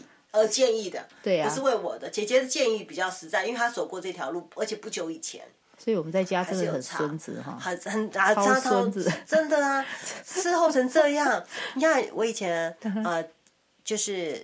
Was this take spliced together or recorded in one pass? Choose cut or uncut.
uncut